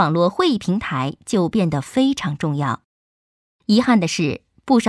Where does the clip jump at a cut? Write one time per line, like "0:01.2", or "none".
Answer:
none